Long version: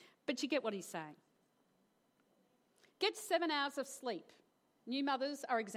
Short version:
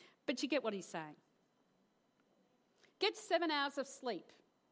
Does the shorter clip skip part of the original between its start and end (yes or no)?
no